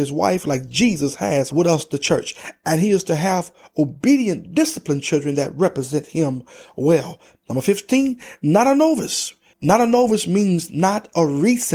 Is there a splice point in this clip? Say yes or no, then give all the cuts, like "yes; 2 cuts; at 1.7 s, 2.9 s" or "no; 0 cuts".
yes; 3 cuts; at 1.5 s, 7.3 s, 9.5 s